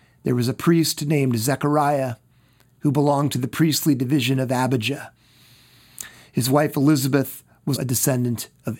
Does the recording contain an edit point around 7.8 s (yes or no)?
yes